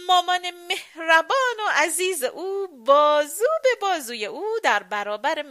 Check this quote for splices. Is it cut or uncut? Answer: uncut